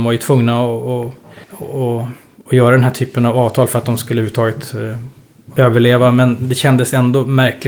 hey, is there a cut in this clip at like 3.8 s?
no; 2 cuts; at 1.4 s, 5.6 s

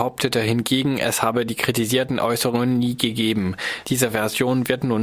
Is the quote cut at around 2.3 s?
no; 1 cut; at 3.8 s

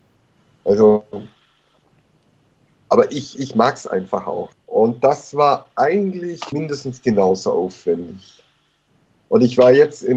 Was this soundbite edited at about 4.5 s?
yes; 2 cuts; at 4.5 s, 6.5 s

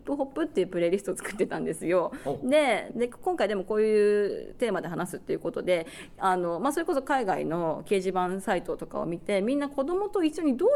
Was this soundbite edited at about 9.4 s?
no; 1 cut; at 2.9 s

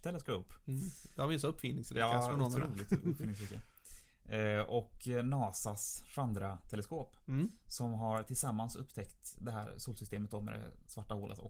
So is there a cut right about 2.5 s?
no; 0 cuts

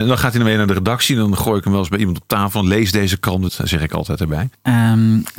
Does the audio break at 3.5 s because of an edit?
yes; 1 cut; at 3.5 s

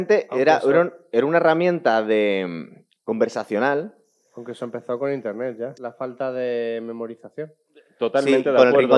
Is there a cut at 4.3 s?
no; 1 cut; at 5.7 s

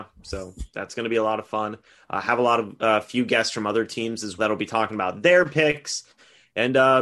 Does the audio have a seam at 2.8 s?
no; 1 cut; at 4.4 s

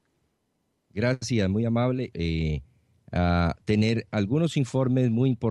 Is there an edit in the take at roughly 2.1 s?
yes; 1 cut; at 2.1 s

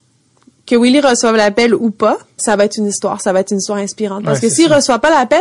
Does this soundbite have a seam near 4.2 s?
no; 1 cut; at 2.4 s

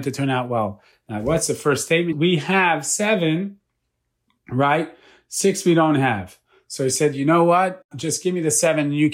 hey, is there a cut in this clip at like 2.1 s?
yes; 1 cut; at 2.1 s

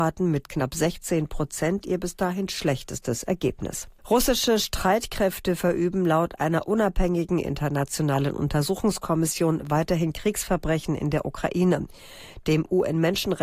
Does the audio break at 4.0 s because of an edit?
yes; 1 cut; at 4.0 s

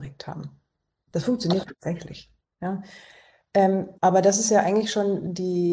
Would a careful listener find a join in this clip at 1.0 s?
no; 1 cut; at 4.0 s

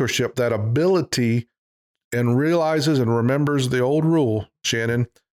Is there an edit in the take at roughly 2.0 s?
no; 0 cuts

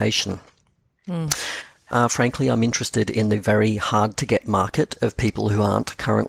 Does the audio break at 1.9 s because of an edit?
yes; 1 cut; at 1.9 s

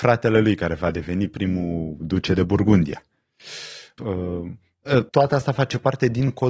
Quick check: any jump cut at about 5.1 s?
yes; 2 cuts; at 4.0 s, 5.1 s

